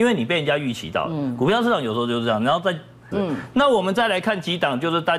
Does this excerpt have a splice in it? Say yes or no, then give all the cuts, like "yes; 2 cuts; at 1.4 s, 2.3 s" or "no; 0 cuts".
yes; 1 cut; at 3.1 s